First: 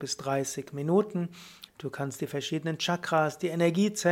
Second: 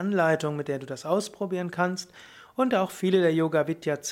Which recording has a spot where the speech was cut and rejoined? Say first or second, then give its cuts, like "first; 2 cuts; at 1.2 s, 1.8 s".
first; 1 cut; at 1.7 s